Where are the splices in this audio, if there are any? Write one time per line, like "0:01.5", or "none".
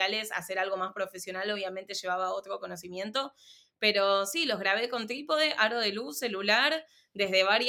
none